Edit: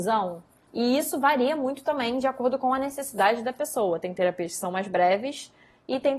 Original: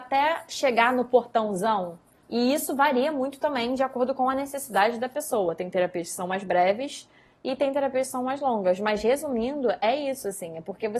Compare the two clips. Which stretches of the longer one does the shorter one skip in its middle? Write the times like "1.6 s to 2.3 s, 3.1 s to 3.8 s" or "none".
none